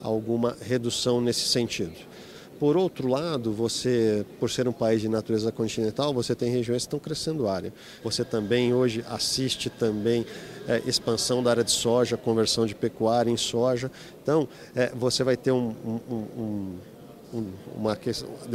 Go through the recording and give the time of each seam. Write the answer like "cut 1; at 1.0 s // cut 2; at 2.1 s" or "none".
cut 1; at 8.0 s